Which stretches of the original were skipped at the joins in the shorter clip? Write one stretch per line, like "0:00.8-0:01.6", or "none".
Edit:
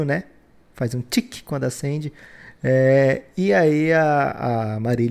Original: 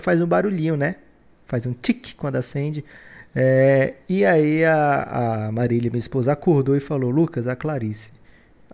none